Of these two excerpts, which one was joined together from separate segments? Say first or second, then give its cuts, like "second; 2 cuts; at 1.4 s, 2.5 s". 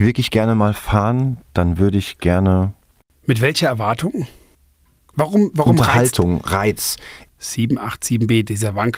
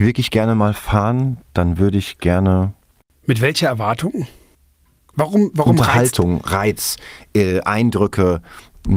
first; 1 cut; at 7.3 s